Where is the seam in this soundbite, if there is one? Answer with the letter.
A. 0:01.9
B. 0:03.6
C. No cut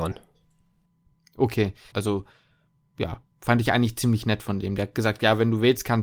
A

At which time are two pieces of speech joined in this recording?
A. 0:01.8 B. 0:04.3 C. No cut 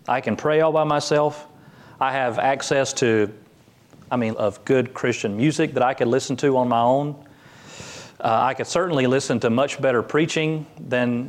B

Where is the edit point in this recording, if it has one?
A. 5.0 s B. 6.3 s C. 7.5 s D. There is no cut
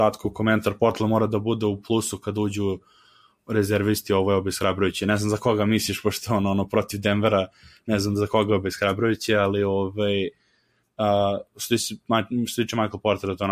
D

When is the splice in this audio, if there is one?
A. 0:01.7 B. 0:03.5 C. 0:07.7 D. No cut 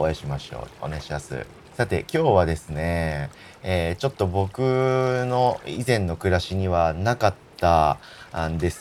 A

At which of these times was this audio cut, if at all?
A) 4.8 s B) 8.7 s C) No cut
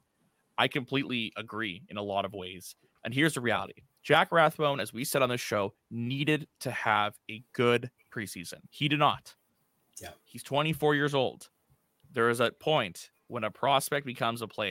B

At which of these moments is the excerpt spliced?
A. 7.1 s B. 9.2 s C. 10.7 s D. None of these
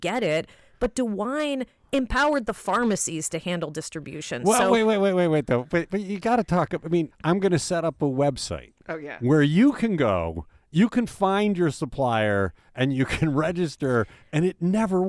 A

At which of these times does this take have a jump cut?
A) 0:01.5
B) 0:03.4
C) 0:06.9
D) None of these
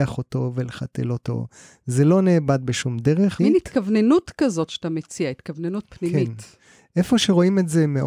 B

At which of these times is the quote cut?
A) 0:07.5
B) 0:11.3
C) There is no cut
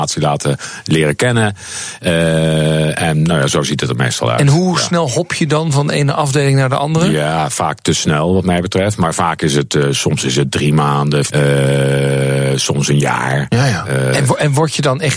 B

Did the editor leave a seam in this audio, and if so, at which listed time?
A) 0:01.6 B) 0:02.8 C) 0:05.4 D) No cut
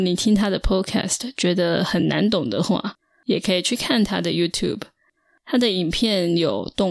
D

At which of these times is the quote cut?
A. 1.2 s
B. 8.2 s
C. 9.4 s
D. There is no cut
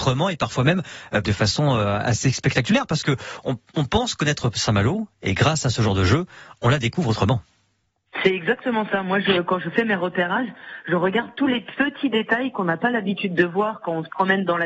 A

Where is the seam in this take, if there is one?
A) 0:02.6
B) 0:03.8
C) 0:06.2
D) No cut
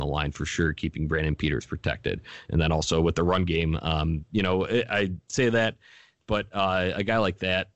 D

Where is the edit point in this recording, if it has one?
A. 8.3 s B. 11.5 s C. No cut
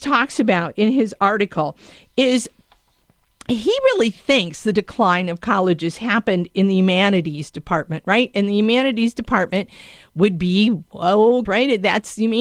B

